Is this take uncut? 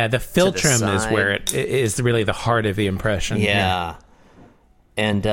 yes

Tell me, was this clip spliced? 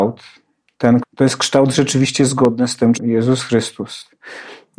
yes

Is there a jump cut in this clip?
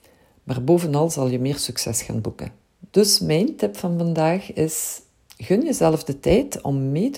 yes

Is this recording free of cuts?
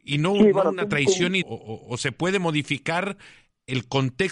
no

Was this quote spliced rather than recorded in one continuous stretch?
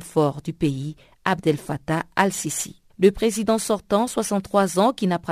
yes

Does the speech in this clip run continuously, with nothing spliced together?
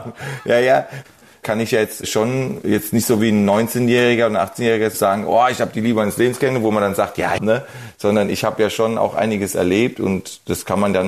no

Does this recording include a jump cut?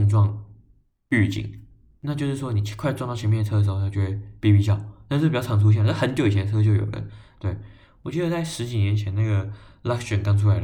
no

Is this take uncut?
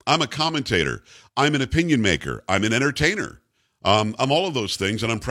yes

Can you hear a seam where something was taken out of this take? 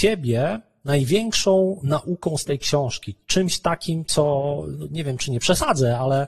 no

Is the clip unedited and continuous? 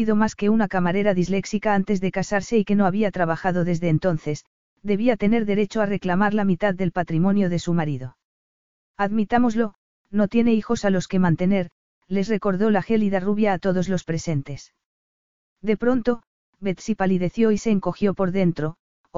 yes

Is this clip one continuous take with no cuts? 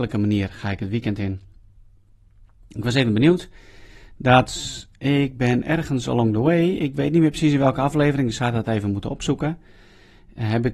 yes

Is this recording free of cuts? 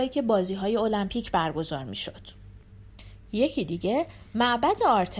yes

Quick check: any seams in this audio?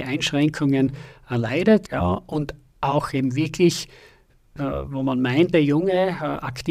yes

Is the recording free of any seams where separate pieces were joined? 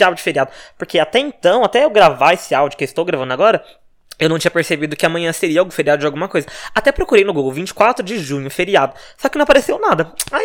yes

